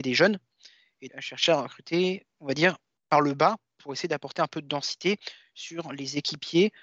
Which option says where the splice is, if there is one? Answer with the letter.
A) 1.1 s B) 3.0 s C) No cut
A